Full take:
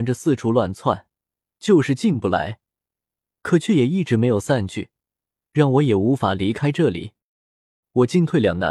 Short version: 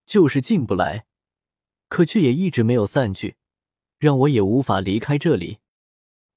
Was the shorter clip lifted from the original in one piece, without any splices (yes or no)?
yes